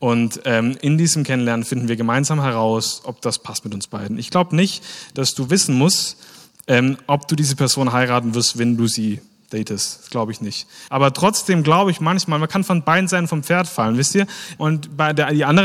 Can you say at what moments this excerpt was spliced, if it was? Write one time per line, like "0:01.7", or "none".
0:10.9
0:14.6